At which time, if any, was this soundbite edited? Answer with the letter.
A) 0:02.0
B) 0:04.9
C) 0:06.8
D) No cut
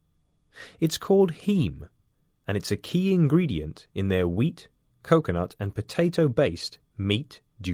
D